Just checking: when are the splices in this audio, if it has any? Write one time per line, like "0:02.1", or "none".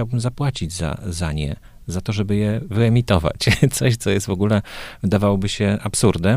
none